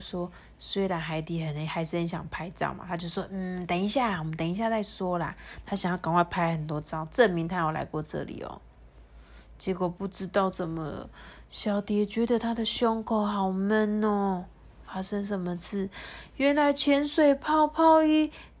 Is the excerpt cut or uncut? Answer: uncut